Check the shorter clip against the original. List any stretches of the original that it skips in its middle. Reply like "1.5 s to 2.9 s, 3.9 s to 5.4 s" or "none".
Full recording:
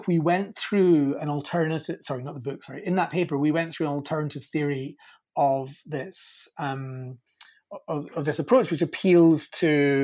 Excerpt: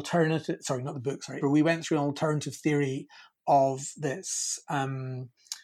2.8 s to 3.3 s